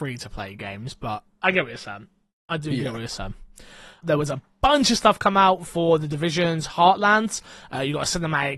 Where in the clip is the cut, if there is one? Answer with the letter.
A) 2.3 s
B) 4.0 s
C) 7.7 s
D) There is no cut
B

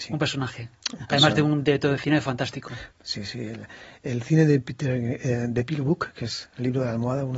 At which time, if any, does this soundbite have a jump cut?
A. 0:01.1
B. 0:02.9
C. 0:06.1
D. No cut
B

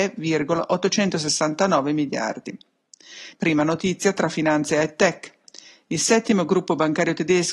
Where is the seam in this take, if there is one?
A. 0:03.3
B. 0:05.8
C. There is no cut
A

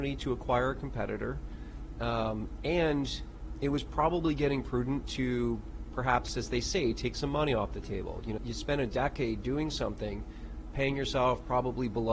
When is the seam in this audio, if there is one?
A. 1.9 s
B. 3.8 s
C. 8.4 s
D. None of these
C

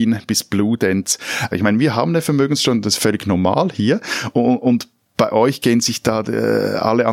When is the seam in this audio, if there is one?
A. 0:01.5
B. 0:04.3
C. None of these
A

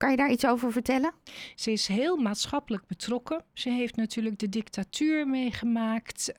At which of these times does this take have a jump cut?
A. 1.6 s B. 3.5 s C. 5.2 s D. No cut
A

